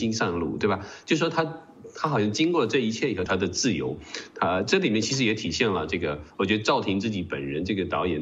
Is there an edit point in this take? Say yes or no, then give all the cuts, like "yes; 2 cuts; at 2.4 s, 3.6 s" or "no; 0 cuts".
yes; 1 cut; at 3.3 s